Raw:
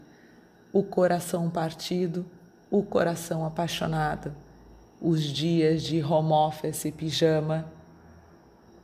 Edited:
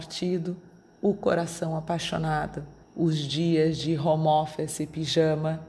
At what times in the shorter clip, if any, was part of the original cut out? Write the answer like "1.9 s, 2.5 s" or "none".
2.8 s